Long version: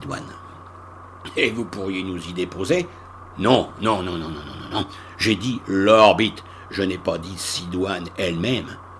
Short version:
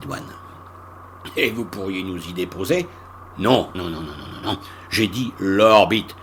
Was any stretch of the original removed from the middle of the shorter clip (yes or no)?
yes